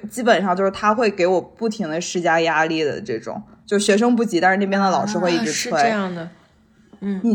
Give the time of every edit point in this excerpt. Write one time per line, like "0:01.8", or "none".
none